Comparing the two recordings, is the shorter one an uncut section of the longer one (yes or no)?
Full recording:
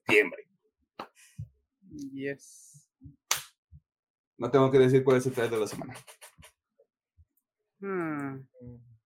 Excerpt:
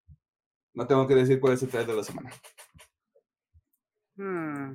yes